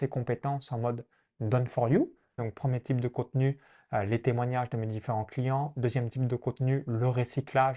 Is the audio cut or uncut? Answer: cut